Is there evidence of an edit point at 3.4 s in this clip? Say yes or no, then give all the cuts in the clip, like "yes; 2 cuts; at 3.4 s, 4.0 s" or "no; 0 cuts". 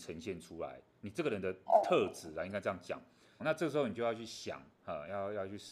yes; 1 cut; at 3.4 s